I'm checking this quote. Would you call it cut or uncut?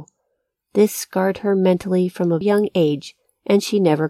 cut